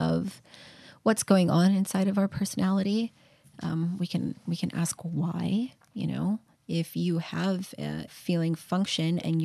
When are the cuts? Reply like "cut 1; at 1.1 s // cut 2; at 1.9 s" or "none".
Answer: cut 1; at 8.1 s